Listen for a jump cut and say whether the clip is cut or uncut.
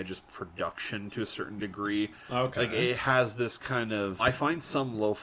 cut